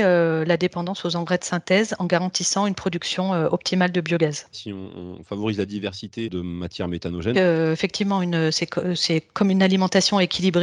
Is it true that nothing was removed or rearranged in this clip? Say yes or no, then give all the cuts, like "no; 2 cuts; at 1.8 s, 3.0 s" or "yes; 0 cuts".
no; 2 cuts; at 4.5 s, 7.3 s